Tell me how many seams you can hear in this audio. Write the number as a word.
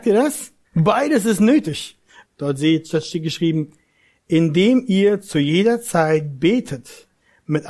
one